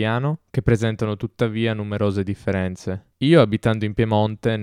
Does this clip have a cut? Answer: no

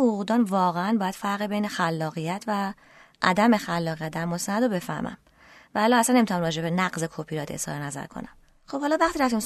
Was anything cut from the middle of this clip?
no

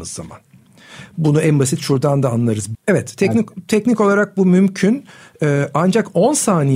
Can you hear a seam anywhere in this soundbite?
yes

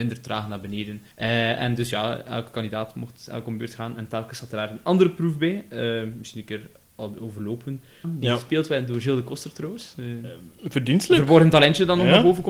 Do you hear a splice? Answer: yes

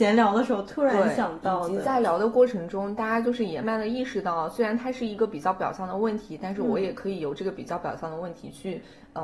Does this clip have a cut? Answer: yes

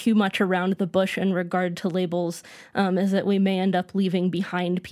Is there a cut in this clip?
no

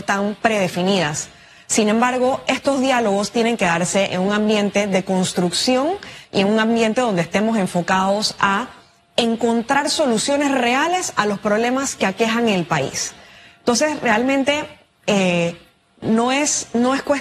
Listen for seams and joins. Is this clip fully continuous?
no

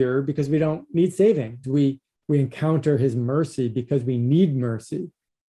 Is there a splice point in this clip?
yes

